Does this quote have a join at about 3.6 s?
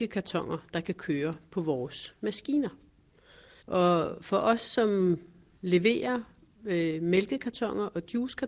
yes; 1 cut; at 3.6 s

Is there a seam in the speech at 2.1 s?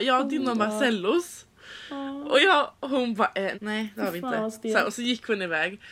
no; 1 cut; at 3.5 s

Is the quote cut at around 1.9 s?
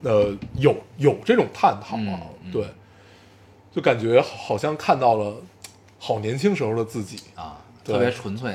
no; 0 cuts

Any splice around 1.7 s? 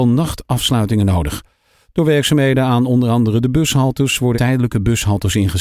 no; 1 cut; at 4.3 s

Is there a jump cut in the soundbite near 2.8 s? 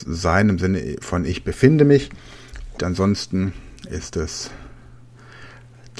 yes; 1 cut; at 2.8 s

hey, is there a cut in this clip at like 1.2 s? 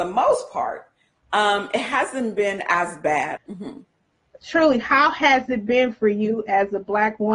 no; 1 cut; at 3.4 s

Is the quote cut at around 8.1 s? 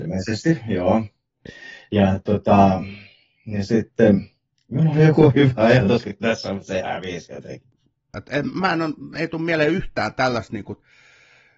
yes; 1 cut; at 8.1 s

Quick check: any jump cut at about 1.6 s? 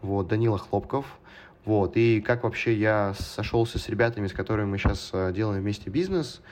yes; 1 cut; at 1.6 s

